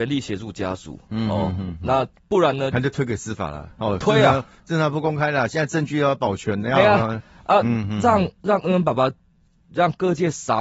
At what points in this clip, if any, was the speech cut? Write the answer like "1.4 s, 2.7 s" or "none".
2.7 s